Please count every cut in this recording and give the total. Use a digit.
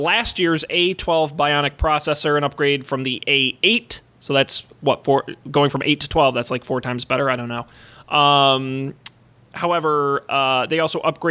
0